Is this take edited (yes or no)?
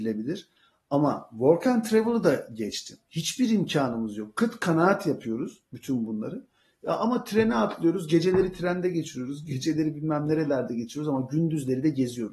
yes